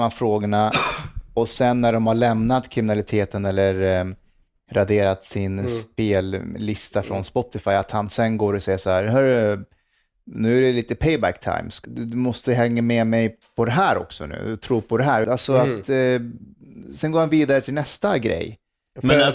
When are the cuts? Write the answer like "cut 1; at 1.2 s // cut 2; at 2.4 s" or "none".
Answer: cut 1; at 11.9 s // cut 2; at 15.2 s